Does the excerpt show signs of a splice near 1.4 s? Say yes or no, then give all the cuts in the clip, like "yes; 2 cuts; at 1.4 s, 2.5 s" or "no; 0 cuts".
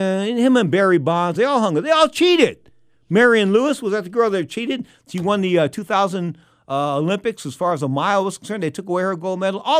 yes; 1 cut; at 1.4 s